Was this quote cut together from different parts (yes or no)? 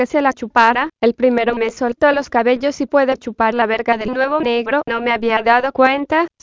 yes